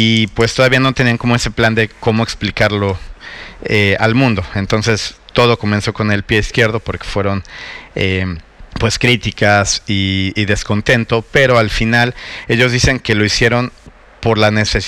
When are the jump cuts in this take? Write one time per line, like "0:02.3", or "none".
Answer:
0:08.7